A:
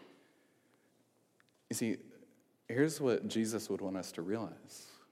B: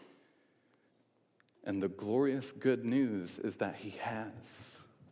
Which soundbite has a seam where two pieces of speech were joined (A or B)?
B